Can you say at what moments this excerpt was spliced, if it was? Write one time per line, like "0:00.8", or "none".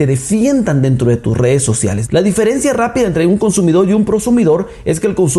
0:02.0